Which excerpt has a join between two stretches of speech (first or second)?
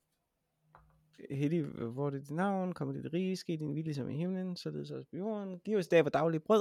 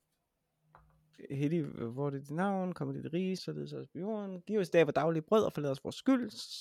second